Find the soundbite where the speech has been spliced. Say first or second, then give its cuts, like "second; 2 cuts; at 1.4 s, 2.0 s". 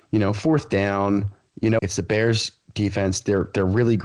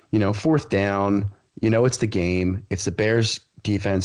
first; 1 cut; at 1.8 s